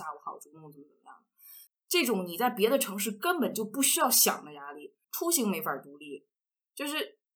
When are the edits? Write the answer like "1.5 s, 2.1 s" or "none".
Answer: 1.7 s, 5.0 s